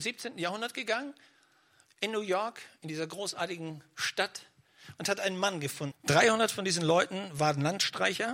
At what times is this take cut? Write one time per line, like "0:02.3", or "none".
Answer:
0:05.9